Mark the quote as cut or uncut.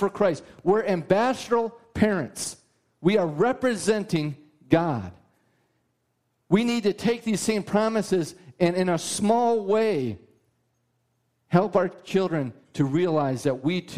uncut